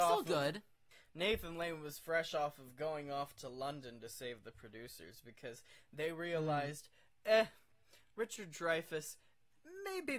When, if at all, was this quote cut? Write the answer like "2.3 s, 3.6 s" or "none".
none